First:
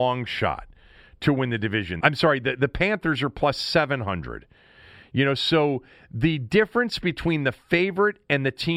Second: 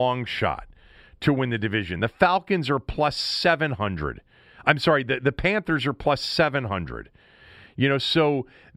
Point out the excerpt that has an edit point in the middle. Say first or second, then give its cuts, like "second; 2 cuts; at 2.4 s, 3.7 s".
first; 1 cut; at 2.0 s